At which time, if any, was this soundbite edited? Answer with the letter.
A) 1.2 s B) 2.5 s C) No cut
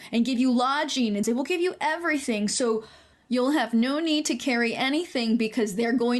A